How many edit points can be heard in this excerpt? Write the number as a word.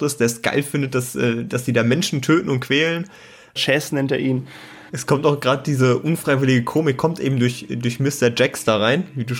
two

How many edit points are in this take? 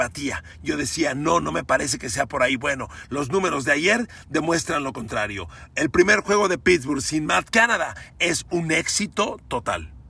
zero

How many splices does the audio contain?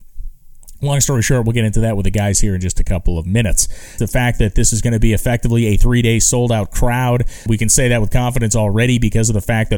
two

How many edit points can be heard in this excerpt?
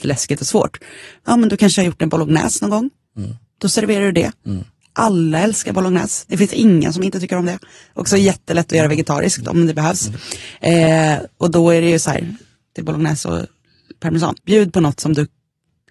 two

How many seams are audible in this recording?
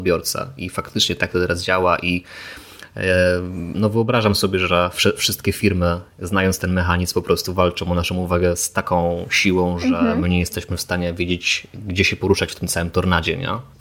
zero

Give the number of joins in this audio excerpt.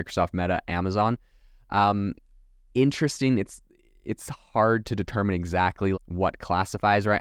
one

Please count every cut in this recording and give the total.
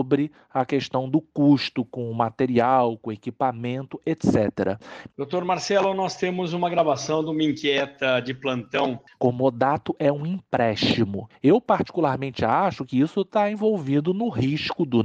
three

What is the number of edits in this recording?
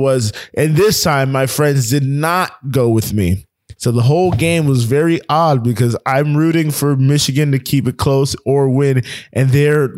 one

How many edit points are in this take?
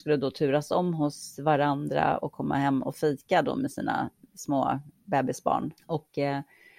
one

